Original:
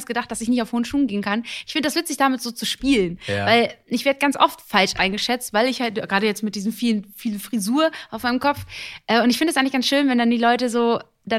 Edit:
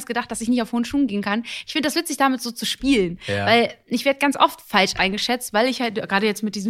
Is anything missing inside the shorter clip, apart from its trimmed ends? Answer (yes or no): no